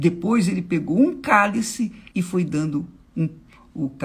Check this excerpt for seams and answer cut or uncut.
cut